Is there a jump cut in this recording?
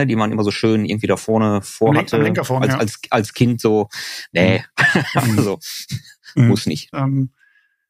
yes; 1 cut; at 6.9 s

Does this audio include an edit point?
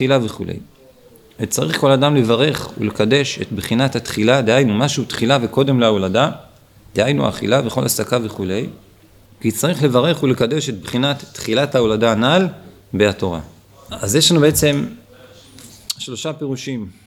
yes; 2 cuts; at 9.3 s, 13.9 s

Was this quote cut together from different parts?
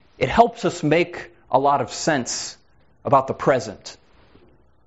no; 0 cuts

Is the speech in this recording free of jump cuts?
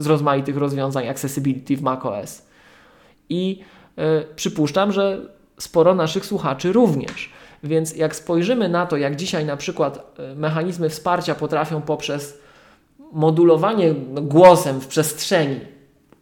yes; 0 cuts

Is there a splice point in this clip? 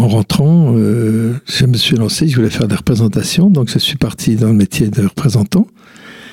no; 0 cuts

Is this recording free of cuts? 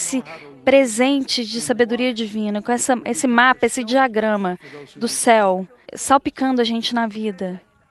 no; 1 cut; at 5.8 s

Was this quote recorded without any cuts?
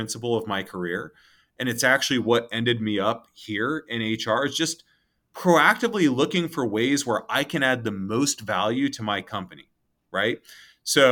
yes; 0 cuts

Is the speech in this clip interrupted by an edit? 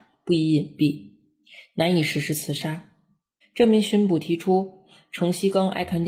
yes; 1 cut; at 3.4 s

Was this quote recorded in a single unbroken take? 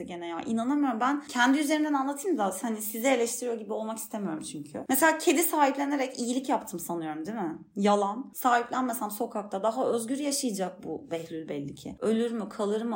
yes; 0 cuts

